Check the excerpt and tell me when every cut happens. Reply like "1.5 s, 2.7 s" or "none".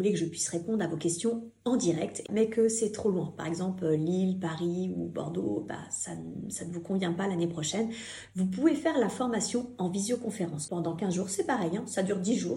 10.7 s